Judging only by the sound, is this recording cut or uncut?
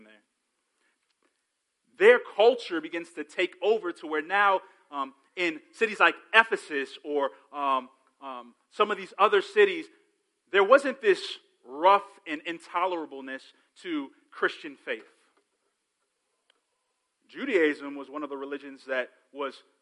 uncut